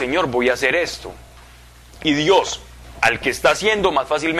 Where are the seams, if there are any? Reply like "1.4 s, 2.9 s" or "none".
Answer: none

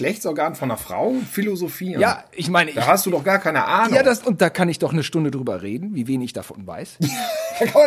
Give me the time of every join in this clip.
none

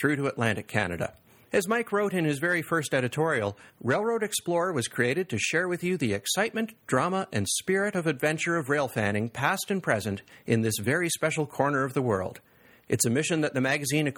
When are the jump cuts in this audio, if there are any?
none

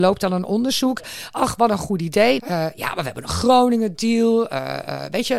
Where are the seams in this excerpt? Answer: 2.4 s

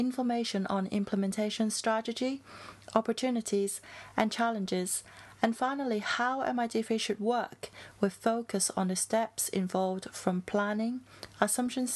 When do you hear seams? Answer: none

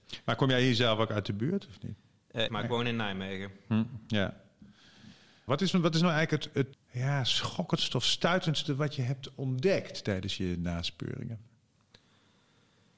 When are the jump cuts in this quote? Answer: 2.5 s, 5.5 s, 6.7 s

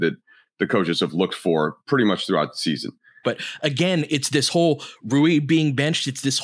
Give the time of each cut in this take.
3.2 s

